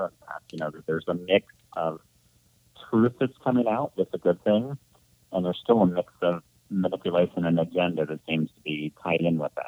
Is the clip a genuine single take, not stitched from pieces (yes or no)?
yes